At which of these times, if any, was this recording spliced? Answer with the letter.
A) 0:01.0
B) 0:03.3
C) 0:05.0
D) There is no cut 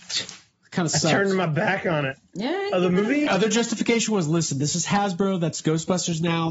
B